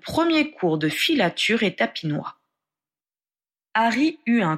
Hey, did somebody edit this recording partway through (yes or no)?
no